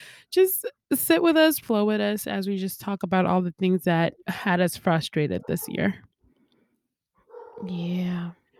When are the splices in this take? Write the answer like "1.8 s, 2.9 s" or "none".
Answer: 1.6 s, 4.2 s